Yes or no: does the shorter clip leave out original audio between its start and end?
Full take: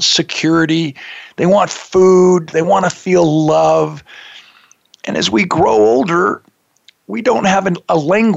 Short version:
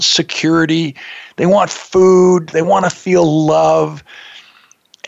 no